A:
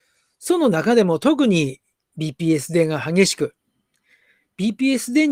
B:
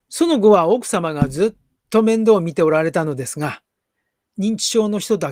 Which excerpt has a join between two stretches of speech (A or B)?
B